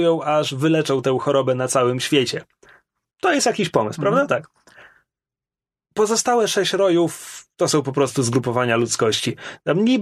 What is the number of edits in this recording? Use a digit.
0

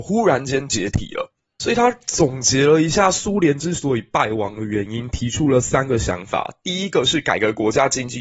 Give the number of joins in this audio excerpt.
0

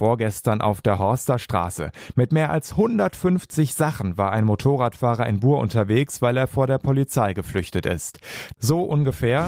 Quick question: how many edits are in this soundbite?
1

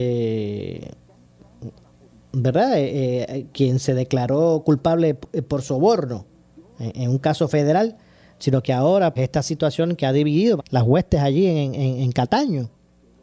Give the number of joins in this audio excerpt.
2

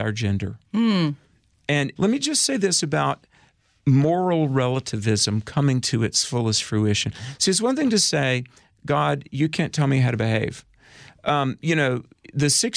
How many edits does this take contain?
1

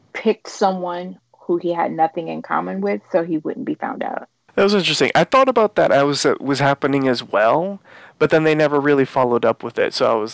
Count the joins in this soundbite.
0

